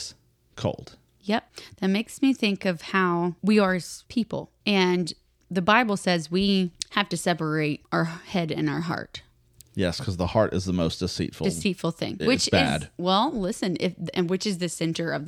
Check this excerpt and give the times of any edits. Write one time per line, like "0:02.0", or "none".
0:12.2